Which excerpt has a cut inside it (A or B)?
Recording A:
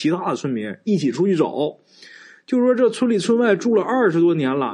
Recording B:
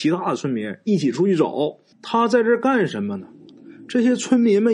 B